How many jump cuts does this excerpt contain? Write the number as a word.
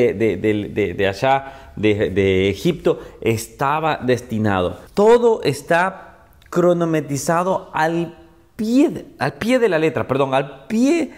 one